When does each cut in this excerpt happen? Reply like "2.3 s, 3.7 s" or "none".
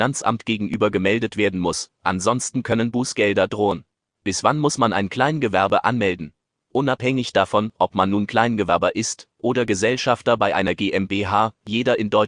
none